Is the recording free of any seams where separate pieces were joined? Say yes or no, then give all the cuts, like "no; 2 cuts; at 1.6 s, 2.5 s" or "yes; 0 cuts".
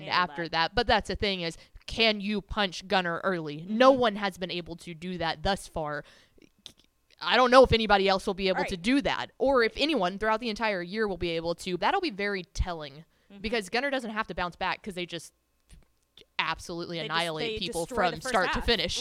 no; 1 cut; at 11.8 s